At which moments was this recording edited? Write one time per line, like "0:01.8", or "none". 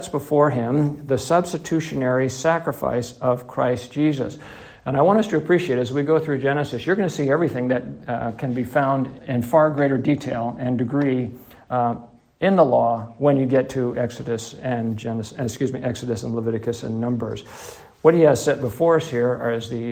0:09.2

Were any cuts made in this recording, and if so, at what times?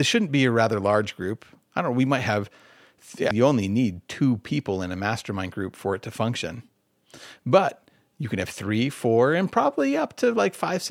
0:03.3

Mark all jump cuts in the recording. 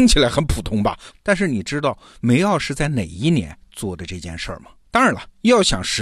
0:01.1
0:04.8

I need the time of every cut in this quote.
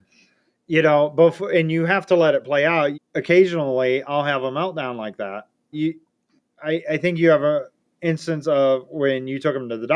0:02.9
0:05.7

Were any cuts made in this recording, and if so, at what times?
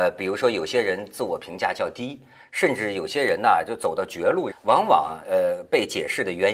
0:04.5

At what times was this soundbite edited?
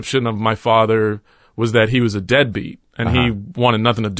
none

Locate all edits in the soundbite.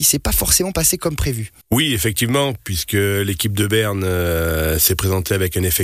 0:01.6

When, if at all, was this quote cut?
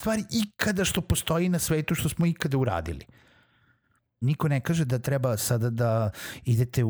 0:04.2

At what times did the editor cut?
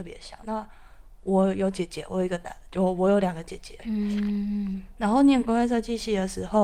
0:03.8

